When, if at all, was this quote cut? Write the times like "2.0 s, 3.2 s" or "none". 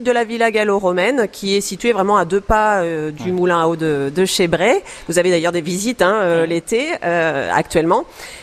none